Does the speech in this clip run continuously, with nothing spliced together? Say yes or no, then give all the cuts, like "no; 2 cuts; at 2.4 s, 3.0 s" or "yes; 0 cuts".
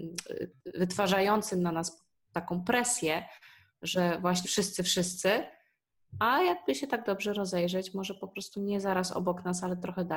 no; 1 cut; at 4.4 s